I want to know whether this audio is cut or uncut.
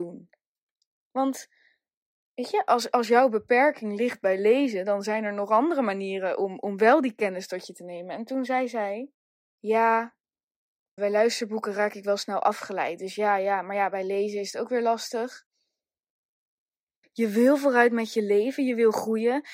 cut